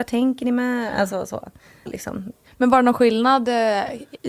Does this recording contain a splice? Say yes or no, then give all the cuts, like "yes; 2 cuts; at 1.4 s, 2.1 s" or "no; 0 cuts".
yes; 1 cut; at 1.9 s